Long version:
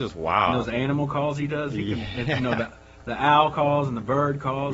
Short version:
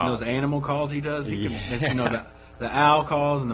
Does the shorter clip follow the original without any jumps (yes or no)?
yes